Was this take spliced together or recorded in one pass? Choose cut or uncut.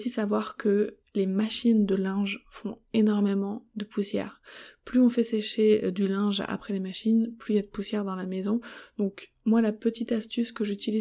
uncut